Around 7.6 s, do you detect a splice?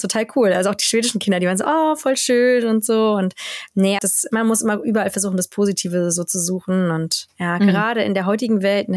no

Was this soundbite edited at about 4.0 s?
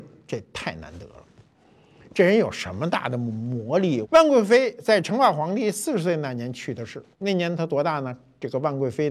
yes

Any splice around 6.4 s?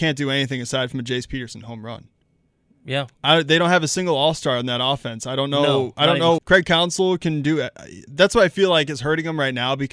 yes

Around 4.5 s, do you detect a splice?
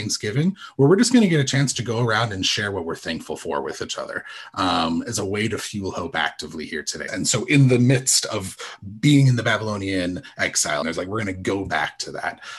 no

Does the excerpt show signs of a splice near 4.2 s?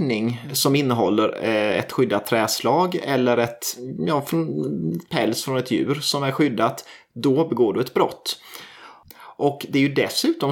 no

